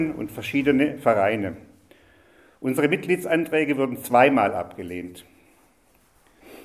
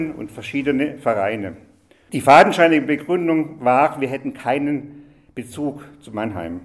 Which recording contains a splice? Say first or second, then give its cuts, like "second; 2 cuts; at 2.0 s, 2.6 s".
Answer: second; 1 cut; at 2.1 s